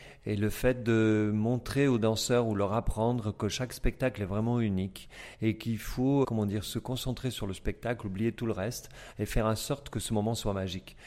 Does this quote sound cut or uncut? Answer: cut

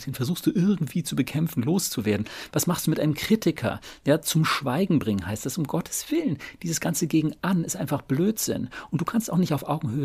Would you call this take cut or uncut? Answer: uncut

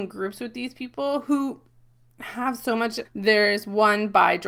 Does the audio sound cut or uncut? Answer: cut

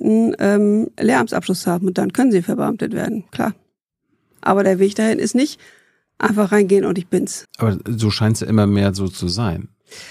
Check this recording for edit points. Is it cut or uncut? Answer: cut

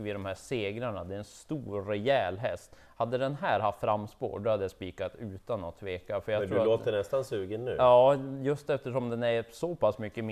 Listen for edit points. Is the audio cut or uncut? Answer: uncut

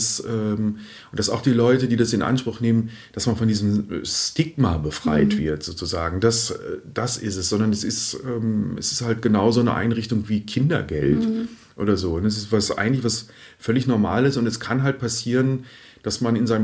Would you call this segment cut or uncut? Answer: uncut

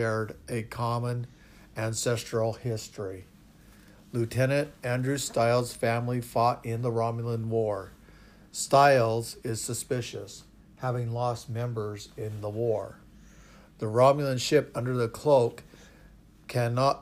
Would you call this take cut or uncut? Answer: uncut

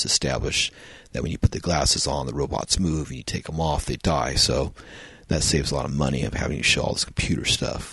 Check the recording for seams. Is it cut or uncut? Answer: uncut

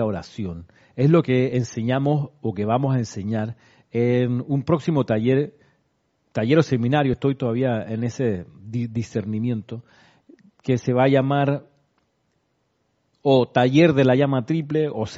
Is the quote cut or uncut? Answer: uncut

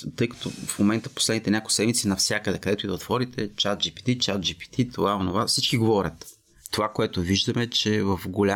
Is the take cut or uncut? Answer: uncut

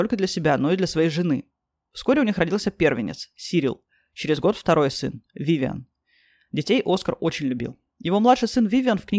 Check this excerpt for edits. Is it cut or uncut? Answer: uncut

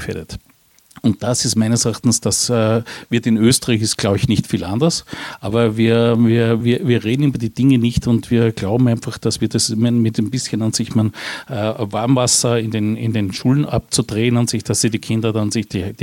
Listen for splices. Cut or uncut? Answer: cut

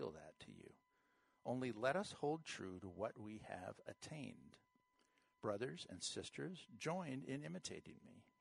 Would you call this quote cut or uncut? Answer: uncut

